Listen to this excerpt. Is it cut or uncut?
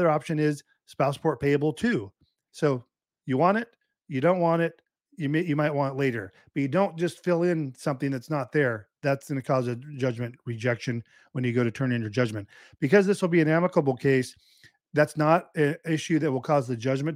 uncut